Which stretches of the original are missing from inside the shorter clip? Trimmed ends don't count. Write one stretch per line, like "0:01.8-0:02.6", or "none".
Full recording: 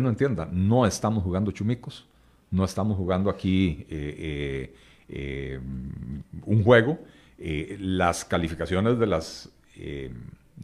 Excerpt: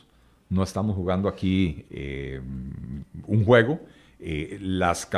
0:03.9-0:05.0